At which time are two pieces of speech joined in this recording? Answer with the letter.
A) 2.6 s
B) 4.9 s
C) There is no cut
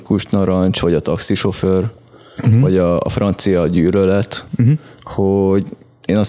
C